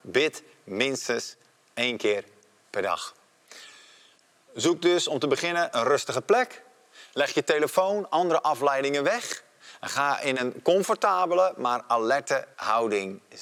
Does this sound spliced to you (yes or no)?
no